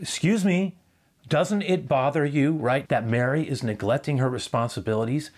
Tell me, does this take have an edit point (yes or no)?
yes